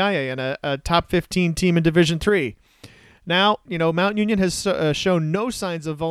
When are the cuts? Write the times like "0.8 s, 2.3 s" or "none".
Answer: 3.7 s